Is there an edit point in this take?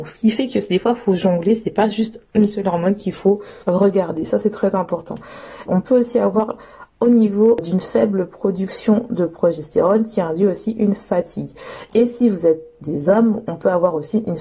yes; 1 cut; at 5.7 s

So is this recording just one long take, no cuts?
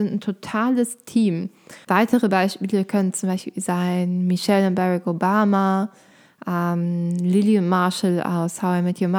no; 1 cut; at 1.8 s

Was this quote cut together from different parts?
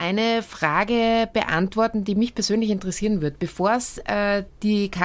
no; 0 cuts

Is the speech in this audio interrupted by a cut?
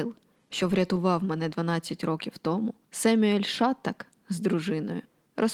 yes; 1 cut; at 2.8 s

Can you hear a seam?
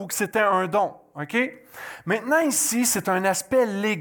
no; 0 cuts

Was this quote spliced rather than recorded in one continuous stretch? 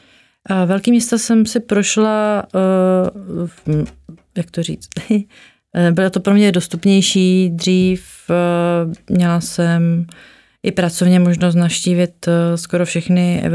no; 0 cuts

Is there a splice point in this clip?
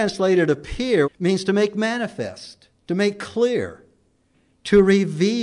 yes; 2 cuts; at 1.0 s, 2.8 s

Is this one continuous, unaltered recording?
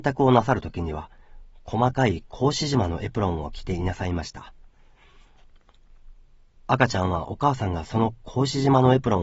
yes; 0 cuts

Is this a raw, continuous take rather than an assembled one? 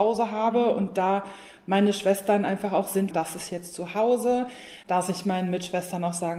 no; 1 cut; at 3.1 s

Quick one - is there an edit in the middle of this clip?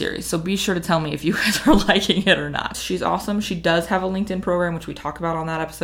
yes; 1 cut; at 2.7 s

